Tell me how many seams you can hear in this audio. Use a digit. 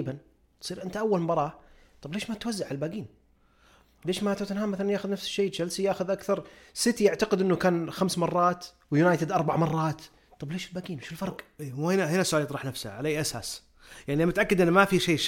0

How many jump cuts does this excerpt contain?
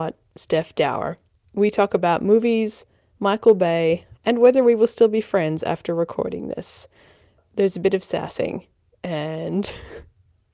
1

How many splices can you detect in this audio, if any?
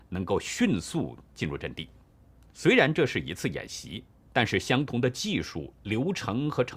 1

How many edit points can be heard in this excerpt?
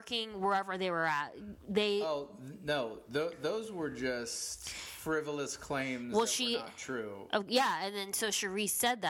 0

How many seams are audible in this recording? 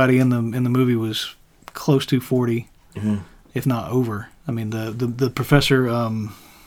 1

